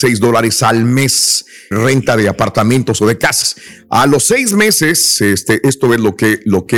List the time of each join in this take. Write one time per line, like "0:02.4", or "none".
0:01.7